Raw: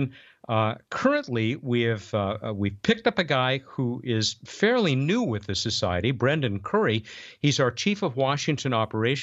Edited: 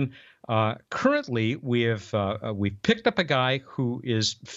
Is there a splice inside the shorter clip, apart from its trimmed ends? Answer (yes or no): no